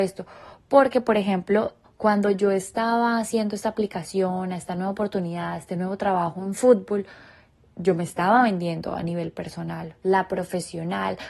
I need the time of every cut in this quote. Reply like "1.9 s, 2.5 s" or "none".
1.8 s, 10.0 s